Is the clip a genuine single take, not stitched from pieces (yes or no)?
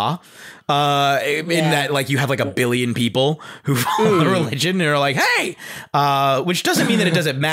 yes